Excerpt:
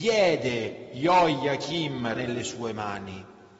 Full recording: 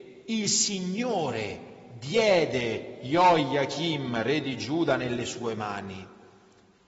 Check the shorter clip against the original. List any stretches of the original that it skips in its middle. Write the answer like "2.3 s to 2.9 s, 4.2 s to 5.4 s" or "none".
4.2 s to 5.0 s